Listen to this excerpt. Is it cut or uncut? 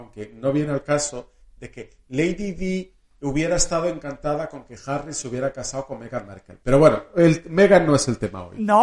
cut